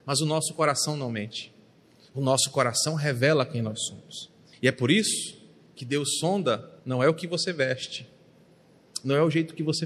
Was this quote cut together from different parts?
yes; 2 cuts; at 4.5 s, 6.8 s

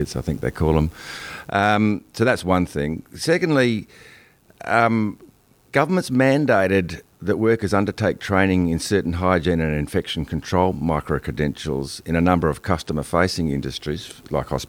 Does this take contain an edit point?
no; 0 cuts

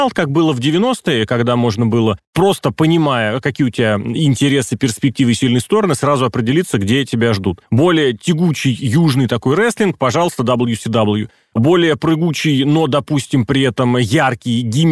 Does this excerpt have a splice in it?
no; 0 cuts

